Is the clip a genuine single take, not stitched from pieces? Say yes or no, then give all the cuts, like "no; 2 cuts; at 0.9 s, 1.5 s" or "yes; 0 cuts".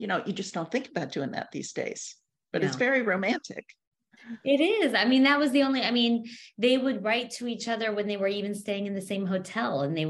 yes; 0 cuts